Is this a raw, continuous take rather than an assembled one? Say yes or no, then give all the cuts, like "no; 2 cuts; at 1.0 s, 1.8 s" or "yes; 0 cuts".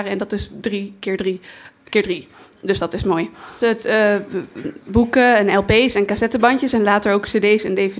no; 1 cut; at 3.6 s